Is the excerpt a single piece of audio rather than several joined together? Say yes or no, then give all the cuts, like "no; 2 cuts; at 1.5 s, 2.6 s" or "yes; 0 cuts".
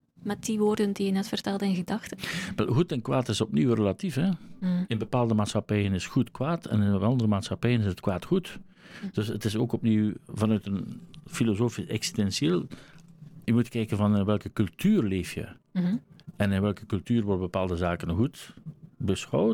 yes; 0 cuts